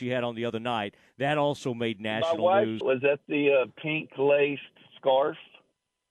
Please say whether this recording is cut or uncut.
cut